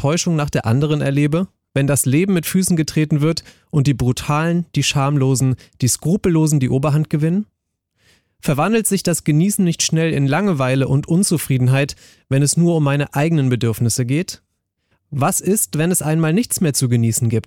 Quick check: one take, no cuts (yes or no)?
yes